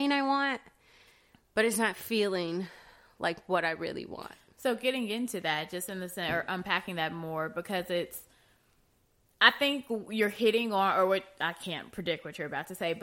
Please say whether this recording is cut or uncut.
uncut